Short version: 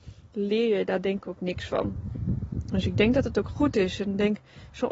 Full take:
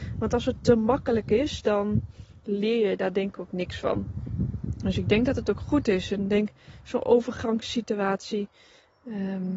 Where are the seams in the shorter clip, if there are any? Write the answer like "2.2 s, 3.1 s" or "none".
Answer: none